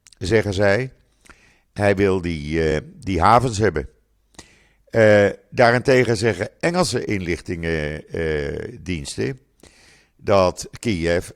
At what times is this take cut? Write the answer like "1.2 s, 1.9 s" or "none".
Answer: none